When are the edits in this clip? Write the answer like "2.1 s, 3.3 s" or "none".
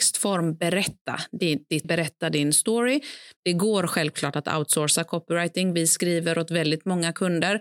1.8 s, 3.4 s

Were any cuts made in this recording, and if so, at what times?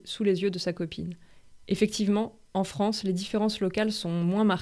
1.6 s

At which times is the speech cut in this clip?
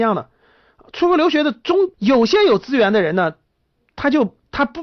1.9 s

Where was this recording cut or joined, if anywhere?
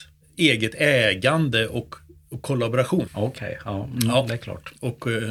3.1 s

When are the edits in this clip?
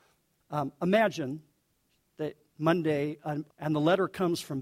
3.5 s

